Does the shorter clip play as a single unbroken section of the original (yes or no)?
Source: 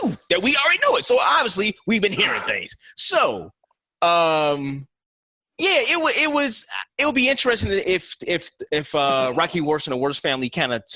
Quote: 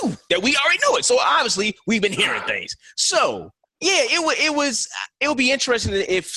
no